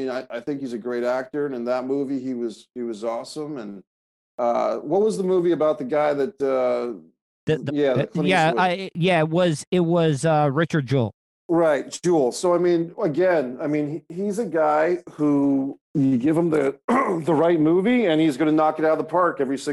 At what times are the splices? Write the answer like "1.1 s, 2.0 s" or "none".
7.7 s, 15.8 s